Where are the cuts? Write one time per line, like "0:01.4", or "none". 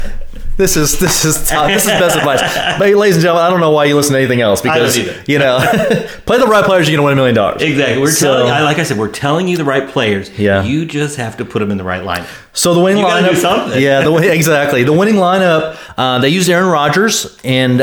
none